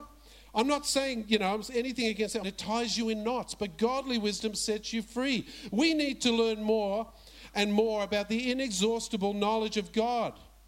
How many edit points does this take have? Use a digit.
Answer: 1